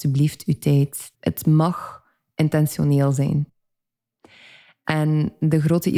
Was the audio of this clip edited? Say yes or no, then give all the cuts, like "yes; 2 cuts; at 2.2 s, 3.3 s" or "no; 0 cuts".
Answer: yes; 1 cut; at 1.1 s